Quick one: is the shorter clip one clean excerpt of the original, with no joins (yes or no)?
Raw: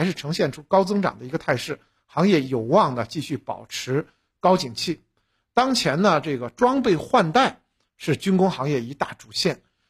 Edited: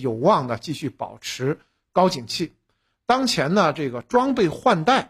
yes